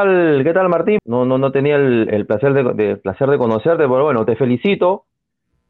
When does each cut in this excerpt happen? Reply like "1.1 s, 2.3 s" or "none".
1.0 s